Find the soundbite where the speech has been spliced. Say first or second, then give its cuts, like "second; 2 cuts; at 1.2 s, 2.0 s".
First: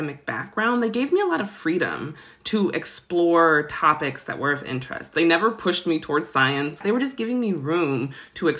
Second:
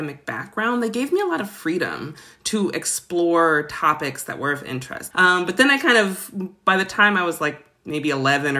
second; 1 cut; at 5.1 s